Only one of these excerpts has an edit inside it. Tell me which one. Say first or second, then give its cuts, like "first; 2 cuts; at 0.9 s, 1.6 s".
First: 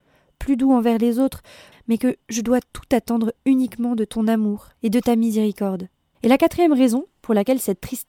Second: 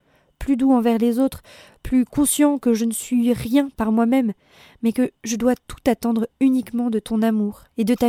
first; 2 cuts; at 1.7 s, 6.1 s